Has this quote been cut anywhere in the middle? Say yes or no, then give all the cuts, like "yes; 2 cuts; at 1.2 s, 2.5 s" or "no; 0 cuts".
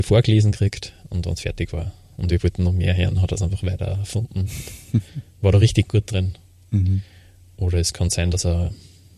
no; 0 cuts